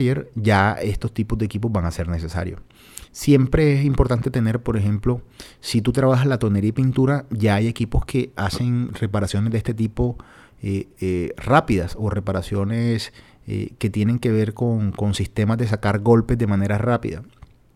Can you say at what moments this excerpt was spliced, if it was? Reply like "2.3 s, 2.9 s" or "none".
none

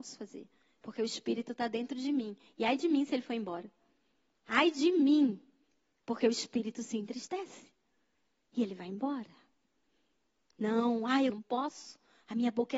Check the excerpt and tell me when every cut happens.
11.3 s

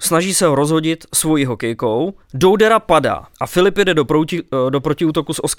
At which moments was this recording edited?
2.2 s, 3.3 s

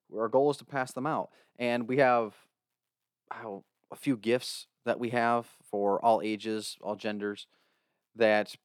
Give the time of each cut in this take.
none

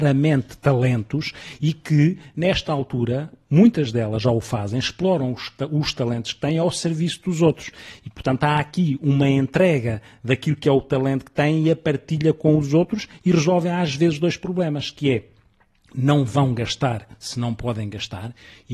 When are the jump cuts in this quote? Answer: none

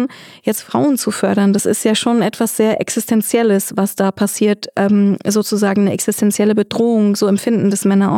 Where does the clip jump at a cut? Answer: none

